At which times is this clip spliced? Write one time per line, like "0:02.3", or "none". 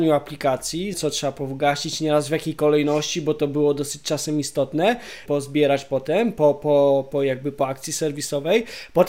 0:00.9
0:05.3